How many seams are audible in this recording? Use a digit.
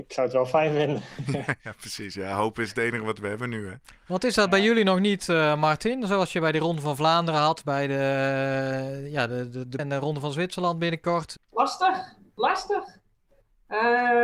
2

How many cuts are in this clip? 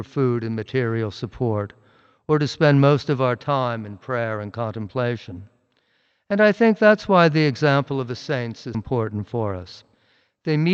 1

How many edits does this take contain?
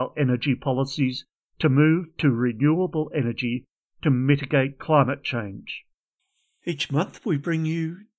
0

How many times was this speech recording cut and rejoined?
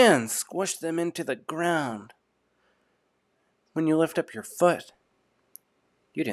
0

